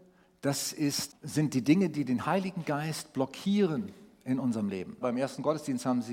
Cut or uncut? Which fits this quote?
cut